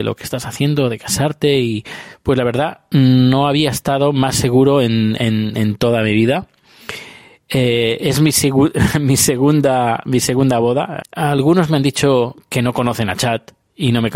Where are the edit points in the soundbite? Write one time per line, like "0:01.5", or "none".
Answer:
0:11.0